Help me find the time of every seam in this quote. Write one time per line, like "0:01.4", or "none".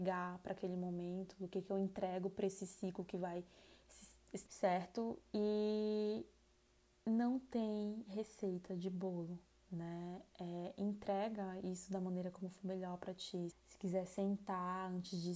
0:04.5
0:13.5